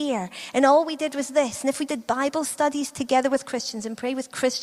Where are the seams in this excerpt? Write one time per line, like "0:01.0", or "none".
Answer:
0:01.9